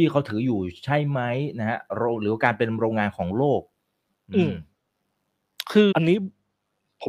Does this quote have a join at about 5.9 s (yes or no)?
yes